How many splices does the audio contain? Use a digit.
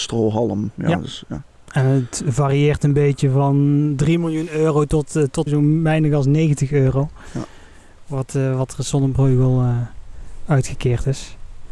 1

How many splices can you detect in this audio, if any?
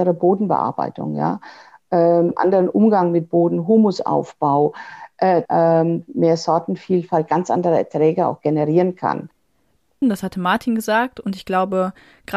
2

